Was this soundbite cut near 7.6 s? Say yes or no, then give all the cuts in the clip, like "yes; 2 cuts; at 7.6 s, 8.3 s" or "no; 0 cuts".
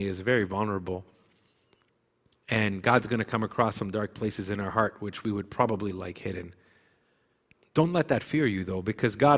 yes; 1 cut; at 7.6 s